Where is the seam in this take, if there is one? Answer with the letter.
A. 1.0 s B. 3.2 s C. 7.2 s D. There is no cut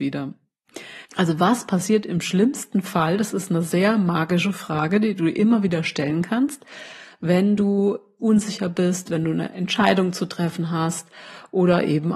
A